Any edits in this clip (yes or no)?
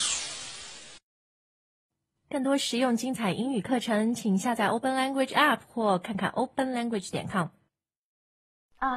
no